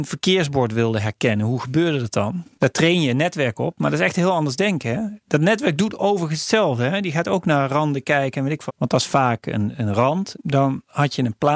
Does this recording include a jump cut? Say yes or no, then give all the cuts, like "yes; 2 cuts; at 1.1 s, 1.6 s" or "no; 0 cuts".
yes; 3 cuts; at 2.5 s, 8.7 s, 10.3 s